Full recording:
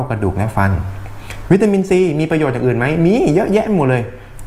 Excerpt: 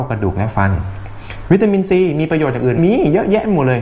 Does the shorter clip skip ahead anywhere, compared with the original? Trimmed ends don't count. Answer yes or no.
yes